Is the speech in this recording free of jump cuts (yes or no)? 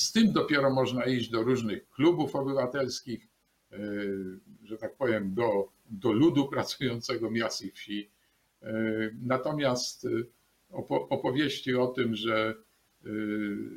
yes